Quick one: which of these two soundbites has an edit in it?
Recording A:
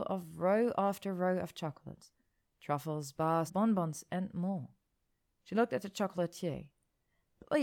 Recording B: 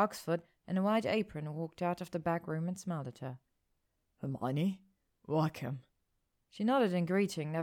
A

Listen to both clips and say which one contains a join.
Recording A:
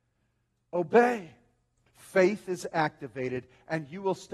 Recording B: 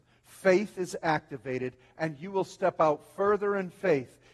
A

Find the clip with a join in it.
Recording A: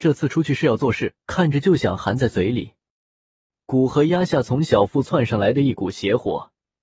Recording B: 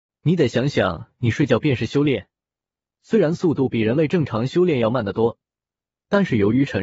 A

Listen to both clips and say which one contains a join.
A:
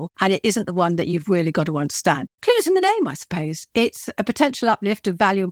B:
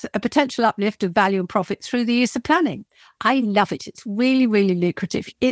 A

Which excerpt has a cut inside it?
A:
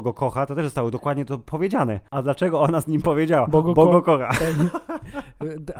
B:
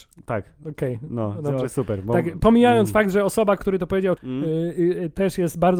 B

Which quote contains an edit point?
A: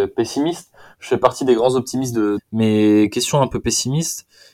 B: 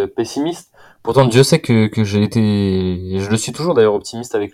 A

